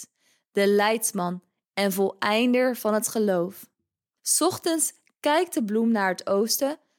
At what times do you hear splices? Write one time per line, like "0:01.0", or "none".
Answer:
0:04.2